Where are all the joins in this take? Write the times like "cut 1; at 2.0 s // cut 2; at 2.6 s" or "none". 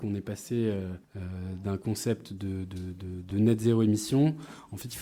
cut 1; at 1.0 s // cut 2; at 3.3 s